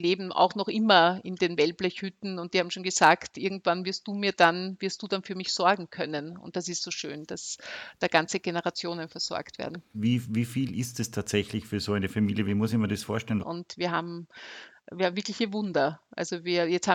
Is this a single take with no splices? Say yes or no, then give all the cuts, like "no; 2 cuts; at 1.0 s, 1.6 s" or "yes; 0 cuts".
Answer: no; 2 cuts; at 9.9 s, 13.4 s